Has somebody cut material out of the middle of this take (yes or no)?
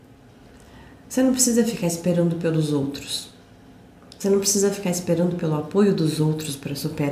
no